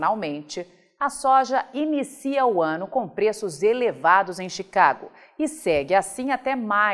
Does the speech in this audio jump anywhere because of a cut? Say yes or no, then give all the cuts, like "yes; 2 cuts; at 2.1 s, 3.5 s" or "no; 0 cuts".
no; 0 cuts